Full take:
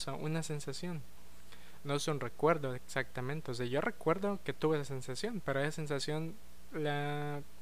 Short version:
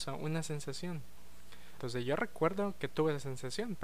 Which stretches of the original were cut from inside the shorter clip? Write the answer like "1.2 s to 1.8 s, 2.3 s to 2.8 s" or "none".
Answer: 1.8 s to 3.4 s